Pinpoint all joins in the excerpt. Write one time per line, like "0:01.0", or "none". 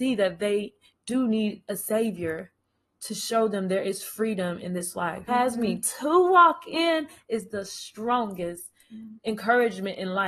0:05.3